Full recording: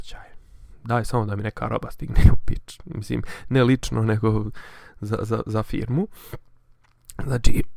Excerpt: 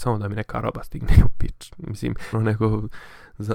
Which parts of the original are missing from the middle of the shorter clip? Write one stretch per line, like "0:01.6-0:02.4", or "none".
0:03.4-0:03.9